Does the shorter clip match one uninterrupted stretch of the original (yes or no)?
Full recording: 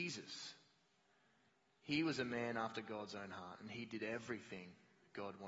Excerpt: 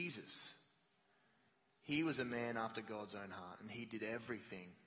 yes